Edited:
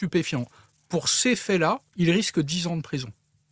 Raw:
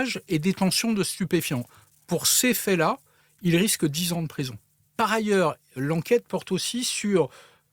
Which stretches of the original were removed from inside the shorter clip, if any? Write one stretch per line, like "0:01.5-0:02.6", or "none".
0:03.1-0:03.3